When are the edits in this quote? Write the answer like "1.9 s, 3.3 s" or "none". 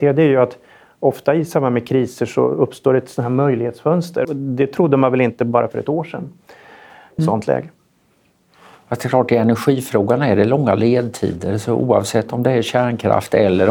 4.2 s, 7.2 s

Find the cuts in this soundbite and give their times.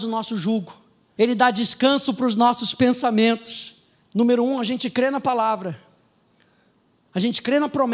1.2 s, 4.0 s

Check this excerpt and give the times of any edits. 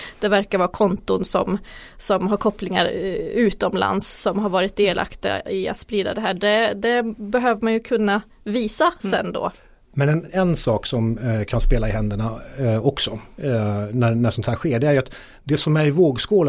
none

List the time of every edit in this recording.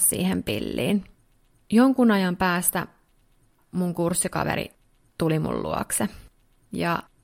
1.6 s

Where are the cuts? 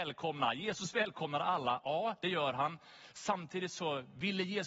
none

